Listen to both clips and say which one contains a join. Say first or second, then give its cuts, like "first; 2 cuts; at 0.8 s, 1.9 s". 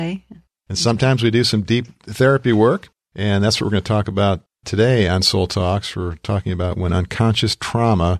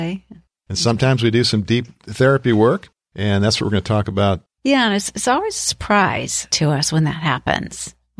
second; 2 cuts; at 4.5 s, 6.5 s